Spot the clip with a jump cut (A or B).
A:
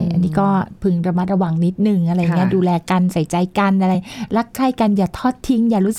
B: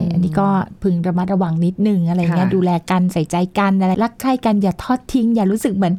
B